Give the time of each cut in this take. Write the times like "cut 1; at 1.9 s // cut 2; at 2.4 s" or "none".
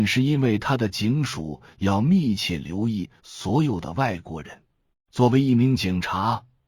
cut 1; at 4.9 s